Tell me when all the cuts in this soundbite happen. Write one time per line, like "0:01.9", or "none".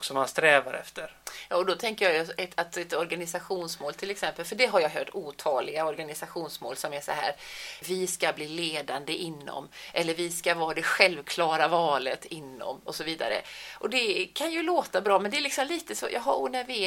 0:07.8